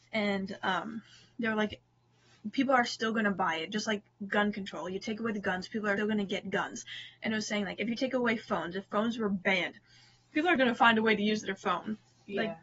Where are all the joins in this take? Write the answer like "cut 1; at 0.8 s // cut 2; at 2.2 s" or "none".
cut 1; at 6.0 s // cut 2; at 10.6 s